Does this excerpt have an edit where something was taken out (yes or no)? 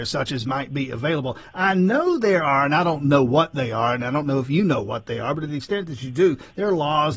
no